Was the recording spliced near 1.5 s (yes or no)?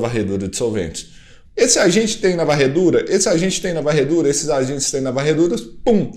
yes